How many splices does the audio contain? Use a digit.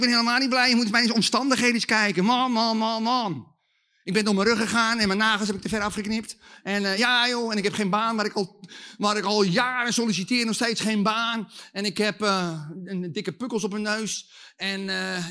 0